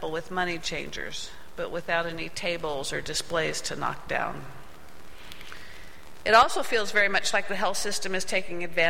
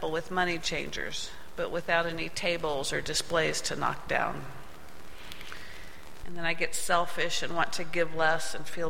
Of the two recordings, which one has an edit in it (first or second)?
second